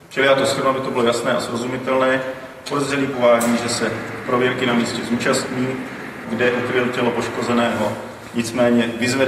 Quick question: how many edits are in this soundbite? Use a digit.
1